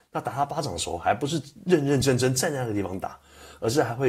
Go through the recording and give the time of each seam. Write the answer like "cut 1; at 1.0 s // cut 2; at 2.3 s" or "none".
none